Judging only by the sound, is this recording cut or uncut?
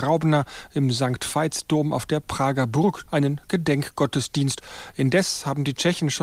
cut